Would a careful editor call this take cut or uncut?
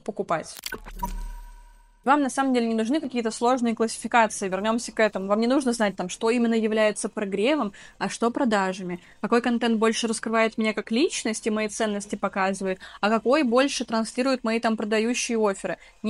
uncut